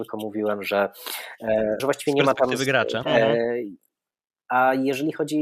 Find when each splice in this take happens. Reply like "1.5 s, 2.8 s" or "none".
1.8 s, 3.0 s